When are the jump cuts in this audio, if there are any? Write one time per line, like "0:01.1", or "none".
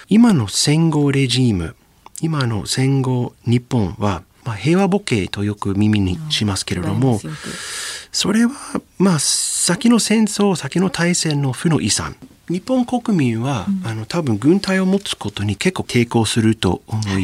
none